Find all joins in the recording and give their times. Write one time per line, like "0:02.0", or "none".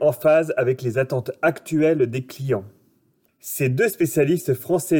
0:03.2